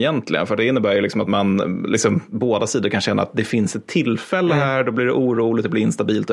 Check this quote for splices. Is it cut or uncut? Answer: cut